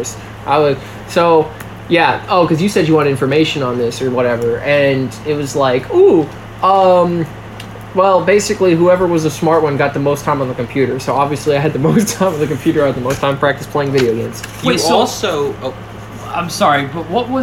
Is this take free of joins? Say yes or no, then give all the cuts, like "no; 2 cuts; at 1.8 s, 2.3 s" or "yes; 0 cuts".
yes; 0 cuts